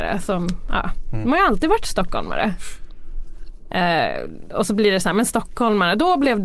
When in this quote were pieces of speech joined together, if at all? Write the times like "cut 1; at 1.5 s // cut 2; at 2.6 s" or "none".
cut 1; at 3.7 s